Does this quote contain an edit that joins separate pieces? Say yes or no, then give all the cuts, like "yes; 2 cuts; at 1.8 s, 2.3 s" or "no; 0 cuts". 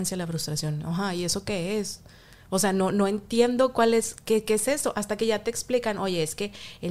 no; 0 cuts